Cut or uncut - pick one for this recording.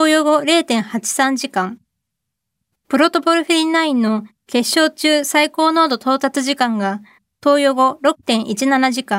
cut